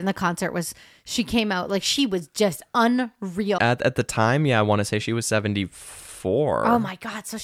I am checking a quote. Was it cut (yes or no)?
yes